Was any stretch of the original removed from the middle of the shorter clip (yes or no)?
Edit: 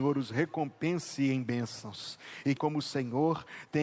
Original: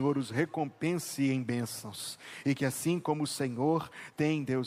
yes